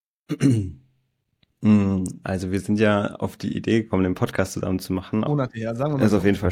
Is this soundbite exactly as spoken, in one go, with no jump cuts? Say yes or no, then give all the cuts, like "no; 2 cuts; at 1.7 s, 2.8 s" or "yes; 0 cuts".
no; 1 cut; at 5.3 s